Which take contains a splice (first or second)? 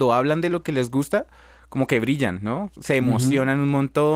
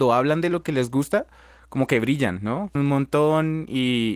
second